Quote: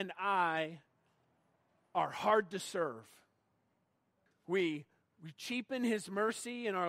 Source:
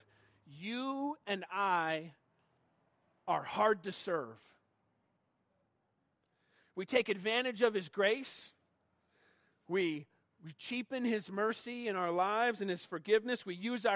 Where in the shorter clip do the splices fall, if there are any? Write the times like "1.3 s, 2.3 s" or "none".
4.3 s

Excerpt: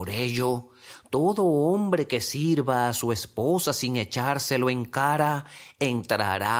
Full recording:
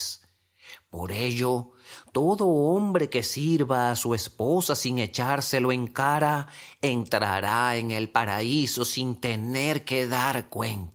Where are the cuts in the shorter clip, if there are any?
none

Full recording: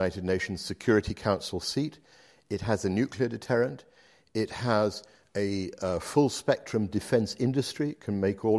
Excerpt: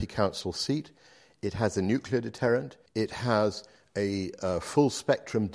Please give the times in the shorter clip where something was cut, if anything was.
2.9 s

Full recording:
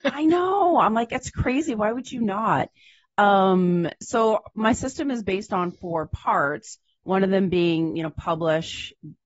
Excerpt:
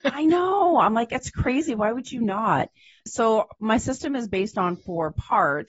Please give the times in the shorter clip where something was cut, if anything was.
3.0 s

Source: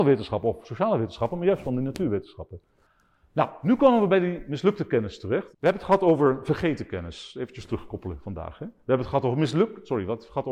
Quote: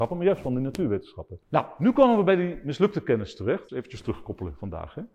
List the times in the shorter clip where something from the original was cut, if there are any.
1.4 s, 3.7 s

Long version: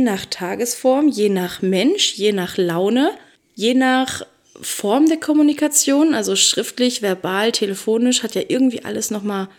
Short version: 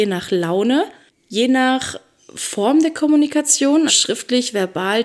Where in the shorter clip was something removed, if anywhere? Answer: 3.9 s

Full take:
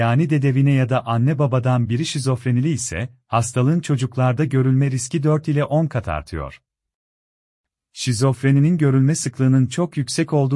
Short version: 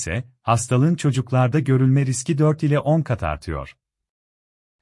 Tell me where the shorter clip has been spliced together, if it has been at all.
none

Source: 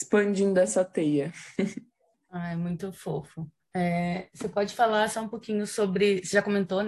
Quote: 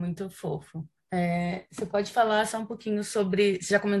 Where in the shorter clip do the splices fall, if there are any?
none

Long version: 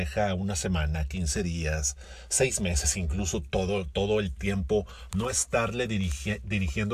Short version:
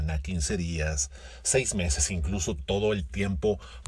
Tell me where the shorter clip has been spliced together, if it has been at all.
2.6 s

